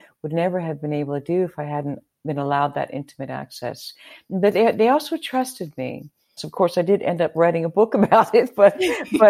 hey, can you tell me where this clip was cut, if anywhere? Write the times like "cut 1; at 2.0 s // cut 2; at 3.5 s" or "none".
cut 1; at 6.4 s